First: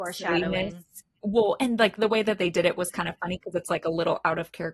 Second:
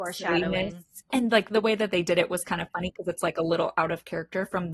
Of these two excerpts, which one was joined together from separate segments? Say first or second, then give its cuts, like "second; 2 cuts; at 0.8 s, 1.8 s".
second; 1 cut; at 1.1 s